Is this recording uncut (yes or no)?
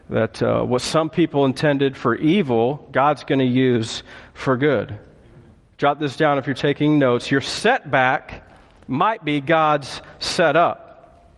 yes